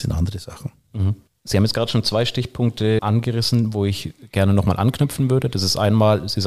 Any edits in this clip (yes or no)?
no